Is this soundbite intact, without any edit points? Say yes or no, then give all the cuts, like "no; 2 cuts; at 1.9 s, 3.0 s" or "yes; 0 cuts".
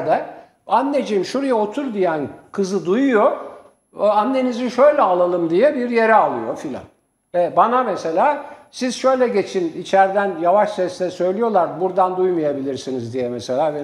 yes; 0 cuts